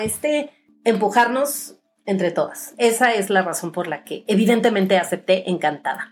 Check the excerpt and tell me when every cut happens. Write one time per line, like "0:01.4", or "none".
none